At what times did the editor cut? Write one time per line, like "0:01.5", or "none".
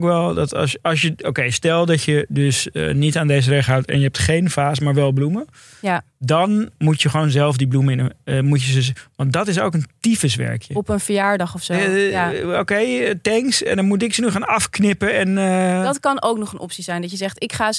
none